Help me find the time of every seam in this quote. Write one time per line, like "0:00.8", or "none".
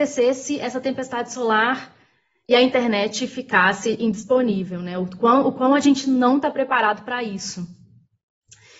none